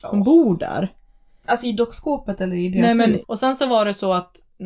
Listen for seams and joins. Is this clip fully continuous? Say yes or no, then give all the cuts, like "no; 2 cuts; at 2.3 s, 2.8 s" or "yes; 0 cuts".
no; 1 cut; at 3.2 s